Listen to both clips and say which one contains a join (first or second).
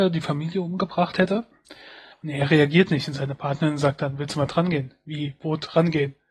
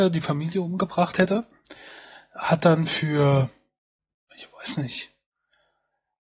first